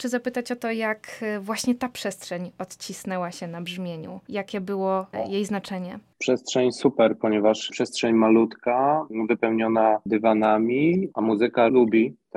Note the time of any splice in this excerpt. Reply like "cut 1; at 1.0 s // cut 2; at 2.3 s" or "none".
cut 1; at 11.1 s